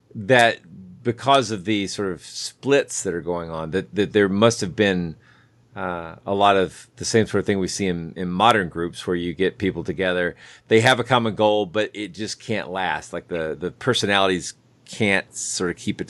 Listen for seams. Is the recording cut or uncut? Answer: uncut